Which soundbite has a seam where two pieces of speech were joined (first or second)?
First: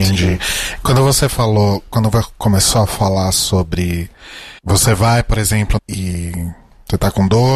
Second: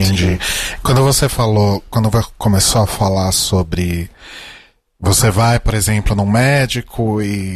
first